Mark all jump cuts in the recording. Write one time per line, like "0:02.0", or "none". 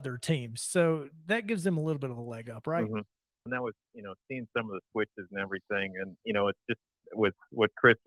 0:03.5